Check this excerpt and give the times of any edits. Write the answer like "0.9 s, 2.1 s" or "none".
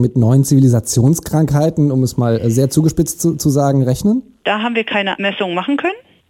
4.4 s